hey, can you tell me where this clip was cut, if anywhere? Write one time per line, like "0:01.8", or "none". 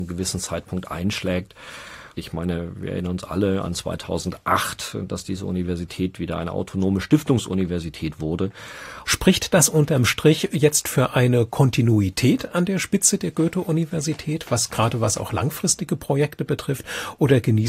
0:09.0